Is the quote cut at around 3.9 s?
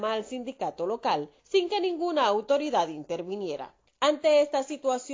yes; 1 cut; at 3.9 s

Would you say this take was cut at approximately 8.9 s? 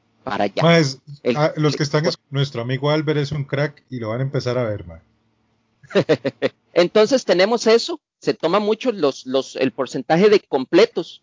no; 2 cuts; at 2.1 s, 6.5 s

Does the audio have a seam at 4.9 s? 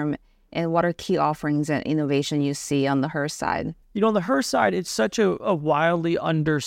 yes; 1 cut; at 4.9 s

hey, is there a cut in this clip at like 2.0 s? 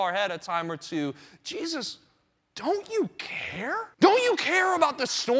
no; 1 cut; at 3.9 s

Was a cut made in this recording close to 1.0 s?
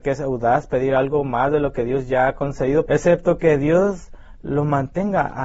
no; 1 cut; at 2.9 s

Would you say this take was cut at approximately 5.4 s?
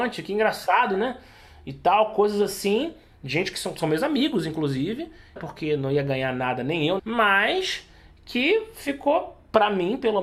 yes; 2 cuts; at 5.4 s, 7.0 s

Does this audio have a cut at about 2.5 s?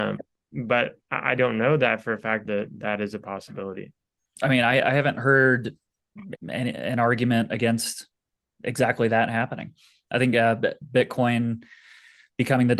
yes; 2 cuts; at 2.5 s, 6.4 s

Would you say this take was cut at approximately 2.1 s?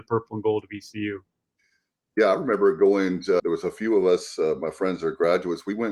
no; 1 cut; at 3.4 s

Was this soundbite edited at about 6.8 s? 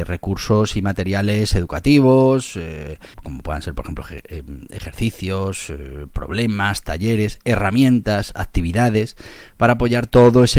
no; 1 cut; at 3.1 s

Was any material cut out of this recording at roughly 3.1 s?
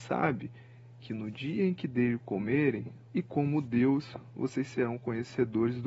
yes; 1 cut; at 3.1 s

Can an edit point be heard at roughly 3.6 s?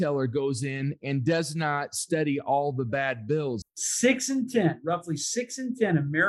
yes; 1 cut; at 3.6 s

